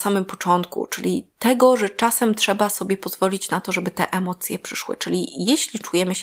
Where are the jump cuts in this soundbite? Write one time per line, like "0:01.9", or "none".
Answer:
none